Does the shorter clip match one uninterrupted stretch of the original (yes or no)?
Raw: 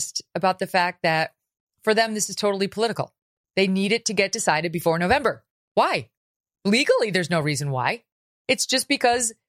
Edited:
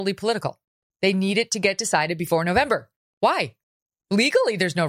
yes